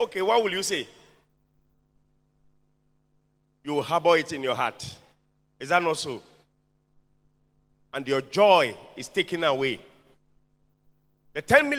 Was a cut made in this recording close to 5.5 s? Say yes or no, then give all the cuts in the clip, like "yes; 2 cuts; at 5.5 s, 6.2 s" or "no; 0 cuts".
no; 0 cuts